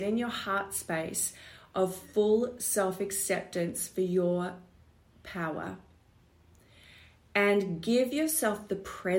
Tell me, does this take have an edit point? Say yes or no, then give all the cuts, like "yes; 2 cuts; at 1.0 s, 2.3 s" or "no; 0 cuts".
no; 0 cuts